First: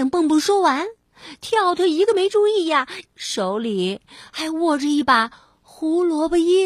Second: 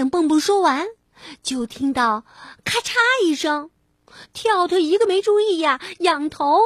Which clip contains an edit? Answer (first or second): first